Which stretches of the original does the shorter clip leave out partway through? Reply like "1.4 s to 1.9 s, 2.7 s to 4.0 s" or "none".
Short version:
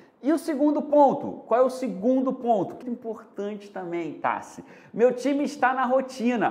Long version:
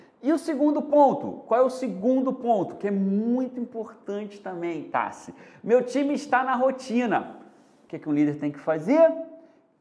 2.8 s to 3.5 s